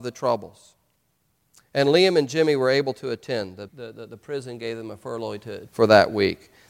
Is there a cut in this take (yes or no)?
yes